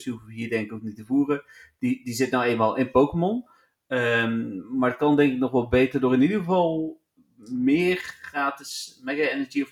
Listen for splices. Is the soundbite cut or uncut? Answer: uncut